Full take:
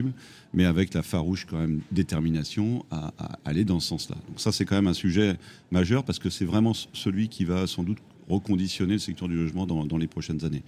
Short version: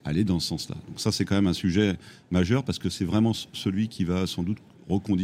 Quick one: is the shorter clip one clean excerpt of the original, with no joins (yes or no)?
yes